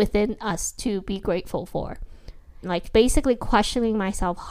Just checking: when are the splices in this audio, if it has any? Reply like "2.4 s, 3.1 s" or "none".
2.6 s